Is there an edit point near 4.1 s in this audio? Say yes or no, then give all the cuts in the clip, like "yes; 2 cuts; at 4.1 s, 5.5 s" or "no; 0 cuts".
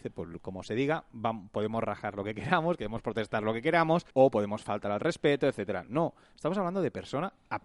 yes; 1 cut; at 4.1 s